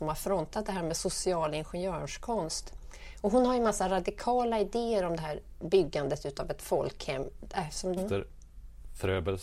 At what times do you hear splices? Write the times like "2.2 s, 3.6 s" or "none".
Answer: 8.0 s

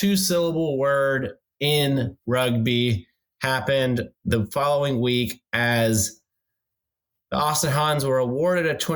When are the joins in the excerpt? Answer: none

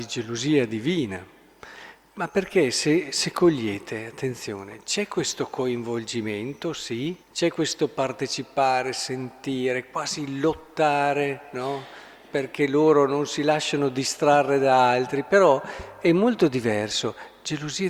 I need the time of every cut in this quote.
7.2 s

